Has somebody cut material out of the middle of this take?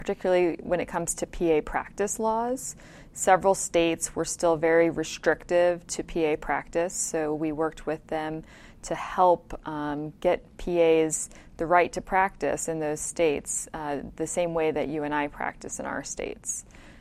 no; 0 cuts

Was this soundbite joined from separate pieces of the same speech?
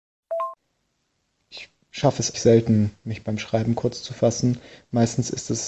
yes; 1 cut; at 2.3 s

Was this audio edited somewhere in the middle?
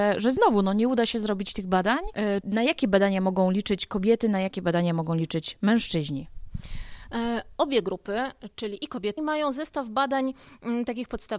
yes; 2 cuts; at 2.4 s, 9.2 s

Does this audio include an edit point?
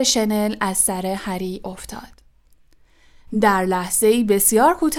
no; 0 cuts

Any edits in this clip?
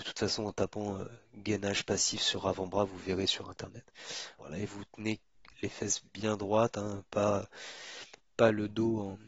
yes; 1 cut; at 4.4 s

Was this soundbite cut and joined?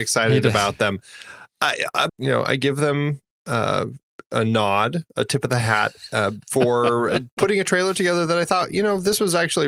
yes; 1 cut; at 2.1 s

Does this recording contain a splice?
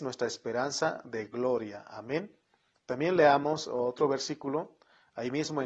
no; 0 cuts

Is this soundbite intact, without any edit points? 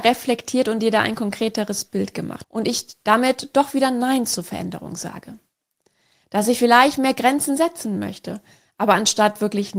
no; 1 cut; at 2.4 s

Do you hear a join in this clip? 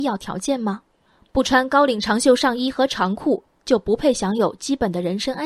no; 0 cuts

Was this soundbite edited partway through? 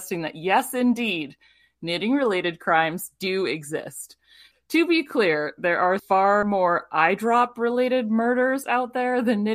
yes; 2 cuts; at 4.5 s, 6.0 s

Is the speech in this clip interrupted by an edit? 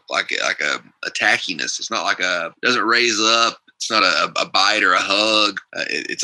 no; 0 cuts

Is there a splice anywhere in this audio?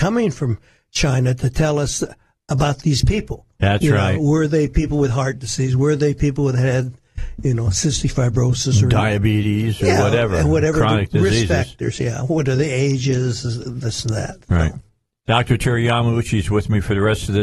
no; 0 cuts

